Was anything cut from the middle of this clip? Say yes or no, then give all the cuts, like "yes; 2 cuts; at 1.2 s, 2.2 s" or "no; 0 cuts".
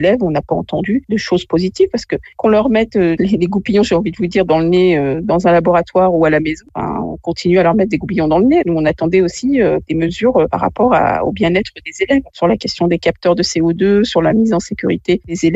no; 0 cuts